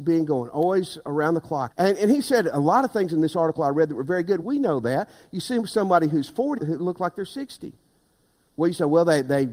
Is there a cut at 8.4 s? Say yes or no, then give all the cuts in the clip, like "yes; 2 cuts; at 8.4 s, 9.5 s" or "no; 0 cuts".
no; 3 cuts; at 1.7 s, 4.4 s, 6.6 s